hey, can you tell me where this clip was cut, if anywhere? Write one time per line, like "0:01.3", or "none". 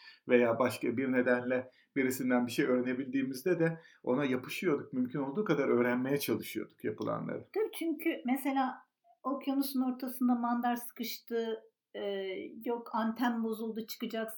none